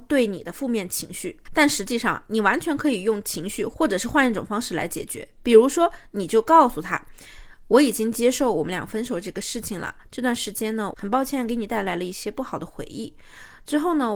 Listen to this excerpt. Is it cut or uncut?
cut